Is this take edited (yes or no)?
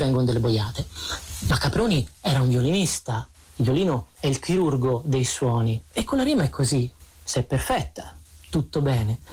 no